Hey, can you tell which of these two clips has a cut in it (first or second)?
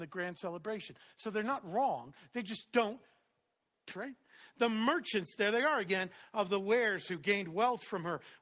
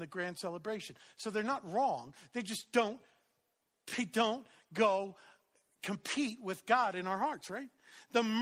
first